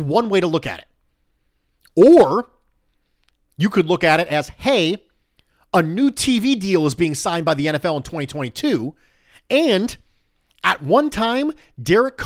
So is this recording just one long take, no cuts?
yes; 0 cuts

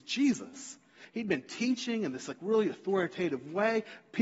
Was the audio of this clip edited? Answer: yes; 1 cut; at 1.0 s

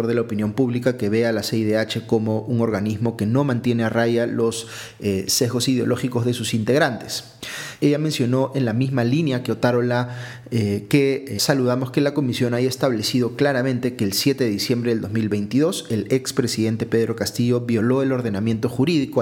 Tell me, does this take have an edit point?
yes; 2 cuts; at 7.8 s, 11.4 s

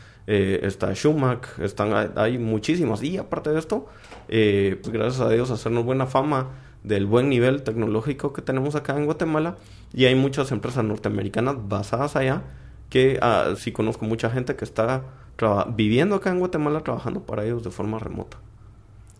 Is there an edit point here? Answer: yes; 2 cuts; at 4.8 s, 13.6 s

